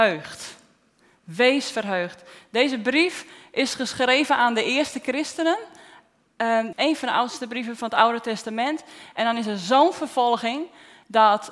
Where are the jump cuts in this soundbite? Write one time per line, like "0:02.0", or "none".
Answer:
0:06.7
0:09.1